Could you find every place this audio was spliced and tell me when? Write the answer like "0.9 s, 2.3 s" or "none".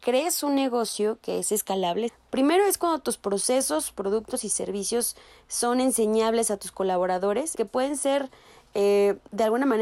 2.1 s, 7.5 s